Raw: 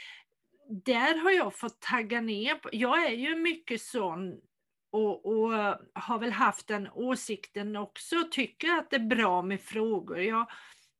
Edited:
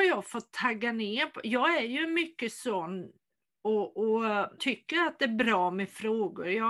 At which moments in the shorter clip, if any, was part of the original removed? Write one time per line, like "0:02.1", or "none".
0:04.6